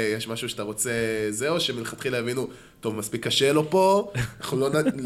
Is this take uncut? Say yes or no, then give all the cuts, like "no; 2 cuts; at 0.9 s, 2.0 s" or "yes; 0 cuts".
yes; 0 cuts